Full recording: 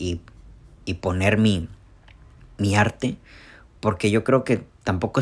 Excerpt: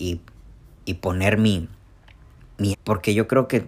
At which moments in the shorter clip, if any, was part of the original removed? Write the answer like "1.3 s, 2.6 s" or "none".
2.7 s